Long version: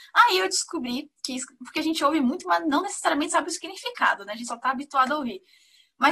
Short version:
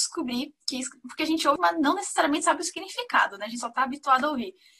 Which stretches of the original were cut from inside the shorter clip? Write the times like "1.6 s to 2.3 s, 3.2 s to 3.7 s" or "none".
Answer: 2.1 s to 2.4 s